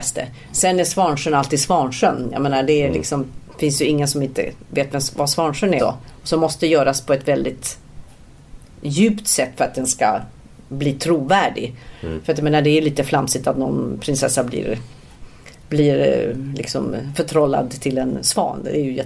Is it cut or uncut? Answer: cut